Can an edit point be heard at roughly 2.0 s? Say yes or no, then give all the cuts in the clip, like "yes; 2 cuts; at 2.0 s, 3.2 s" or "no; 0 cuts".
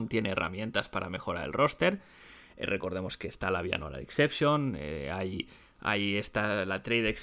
no; 0 cuts